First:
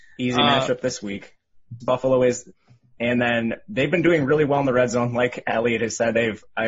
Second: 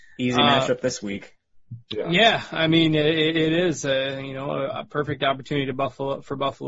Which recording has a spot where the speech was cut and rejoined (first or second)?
first